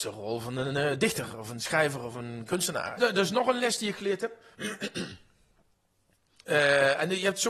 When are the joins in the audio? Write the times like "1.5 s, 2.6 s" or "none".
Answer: 3.0 s